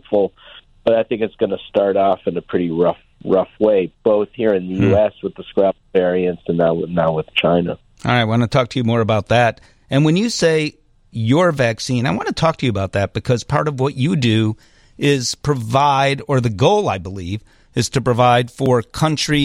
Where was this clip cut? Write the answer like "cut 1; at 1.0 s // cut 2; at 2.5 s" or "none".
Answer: none